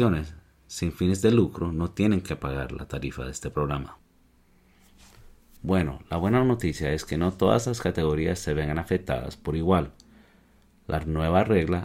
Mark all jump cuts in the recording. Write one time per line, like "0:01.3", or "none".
0:05.6